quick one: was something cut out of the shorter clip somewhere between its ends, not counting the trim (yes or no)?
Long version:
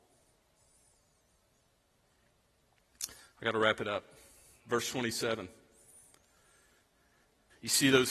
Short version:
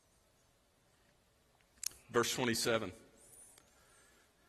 yes